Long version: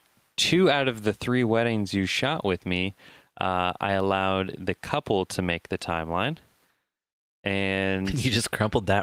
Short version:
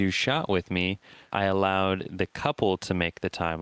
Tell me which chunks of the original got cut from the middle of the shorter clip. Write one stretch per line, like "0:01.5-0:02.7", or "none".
0:03.3-0:03.8

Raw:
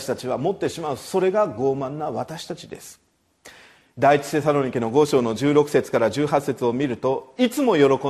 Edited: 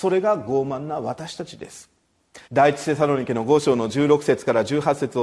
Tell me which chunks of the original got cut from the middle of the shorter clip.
0:03.5-0:03.9

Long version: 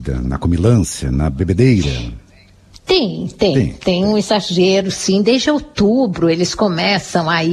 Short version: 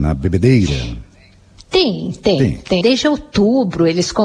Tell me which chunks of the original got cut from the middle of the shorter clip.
0:04.0-0:05.2

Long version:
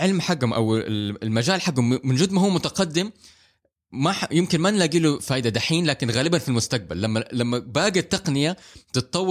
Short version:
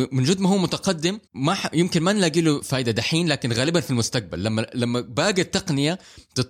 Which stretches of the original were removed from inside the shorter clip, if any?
0:03.2-0:03.8

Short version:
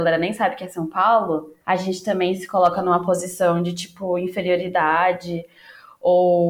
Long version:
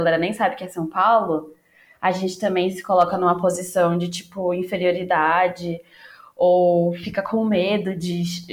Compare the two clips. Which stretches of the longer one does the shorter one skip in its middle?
0:01.6-0:02.0

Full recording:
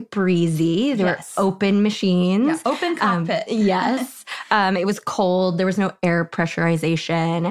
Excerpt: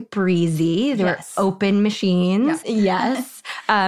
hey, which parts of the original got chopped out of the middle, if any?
0:02.6-0:03.5

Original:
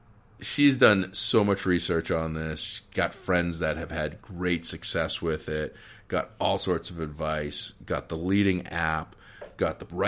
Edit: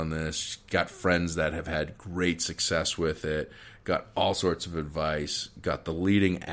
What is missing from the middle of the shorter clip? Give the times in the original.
none

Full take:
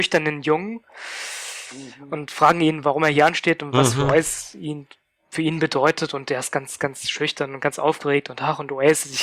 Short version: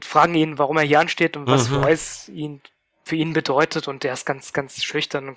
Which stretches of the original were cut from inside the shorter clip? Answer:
none

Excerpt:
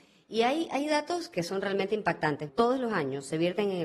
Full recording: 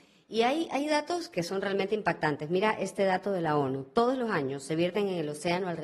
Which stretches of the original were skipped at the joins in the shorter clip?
0:02.5-0:03.9

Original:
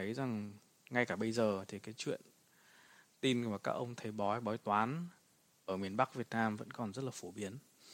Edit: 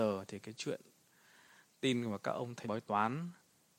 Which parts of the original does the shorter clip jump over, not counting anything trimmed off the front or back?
0:04.0-0:04.4

